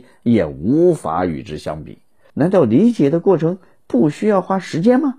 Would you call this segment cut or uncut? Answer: cut